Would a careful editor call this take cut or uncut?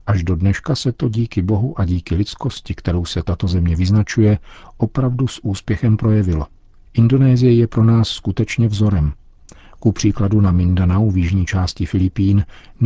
uncut